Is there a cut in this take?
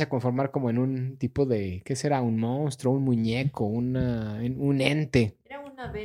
no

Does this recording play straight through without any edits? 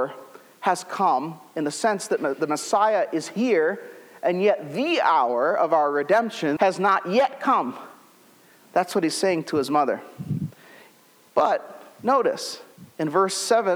no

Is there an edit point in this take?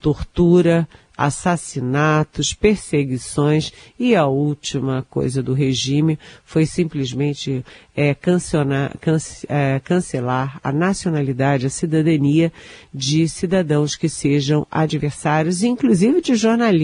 no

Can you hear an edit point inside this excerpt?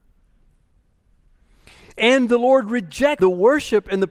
yes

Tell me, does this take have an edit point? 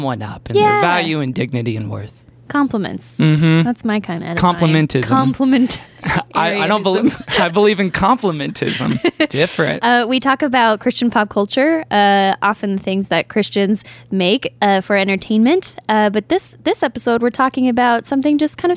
no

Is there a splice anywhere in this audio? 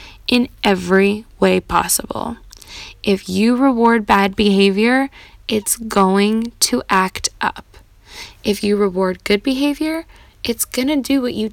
no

